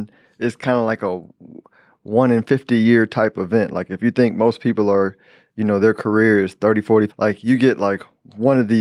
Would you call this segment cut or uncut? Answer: cut